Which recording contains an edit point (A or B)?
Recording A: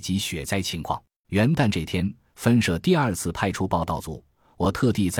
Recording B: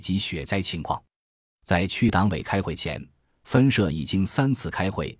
A